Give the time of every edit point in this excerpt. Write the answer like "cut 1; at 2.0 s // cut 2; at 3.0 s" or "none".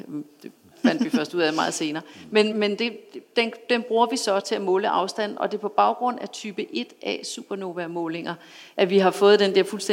cut 1; at 2.5 s

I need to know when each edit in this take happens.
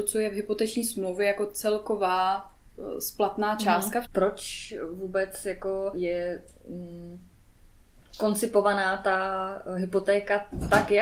cut 1; at 4.1 s // cut 2; at 5.9 s

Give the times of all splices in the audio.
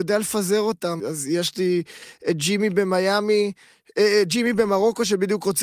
cut 1; at 1.0 s

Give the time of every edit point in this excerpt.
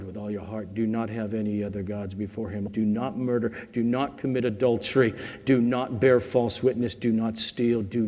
cut 1; at 2.7 s

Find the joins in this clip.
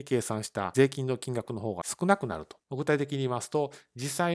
cut 1; at 2.6 s

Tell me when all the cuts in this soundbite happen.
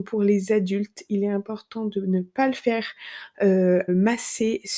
cut 1; at 3.9 s

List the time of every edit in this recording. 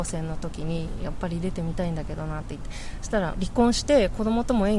cut 1; at 3.3 s

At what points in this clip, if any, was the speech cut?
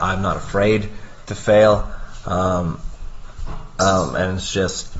none

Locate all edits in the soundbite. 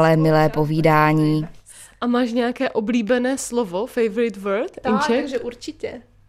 none

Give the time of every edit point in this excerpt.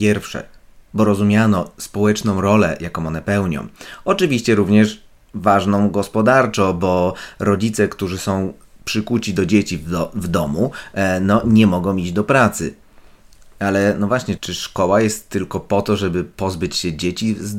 cut 1; at 14.4 s

